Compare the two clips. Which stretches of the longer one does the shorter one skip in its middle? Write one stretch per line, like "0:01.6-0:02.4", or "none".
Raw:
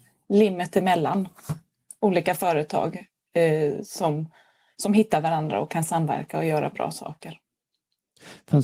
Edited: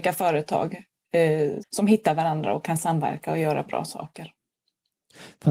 0:03.8-0:04.7